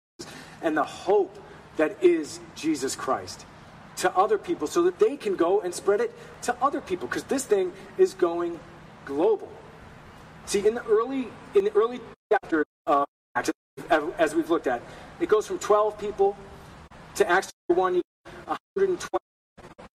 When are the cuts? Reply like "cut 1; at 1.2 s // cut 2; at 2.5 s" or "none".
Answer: cut 1; at 10.4 s